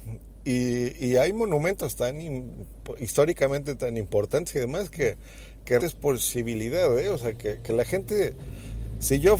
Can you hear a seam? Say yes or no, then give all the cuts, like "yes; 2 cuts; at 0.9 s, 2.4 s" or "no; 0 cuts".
yes; 1 cut; at 5.8 s